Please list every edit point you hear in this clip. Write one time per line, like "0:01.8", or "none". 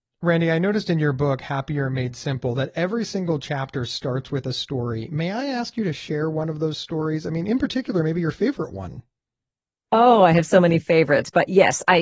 none